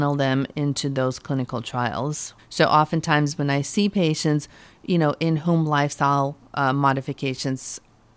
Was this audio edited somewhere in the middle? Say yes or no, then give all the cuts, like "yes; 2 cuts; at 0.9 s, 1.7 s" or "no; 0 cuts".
yes; 1 cut; at 2.4 s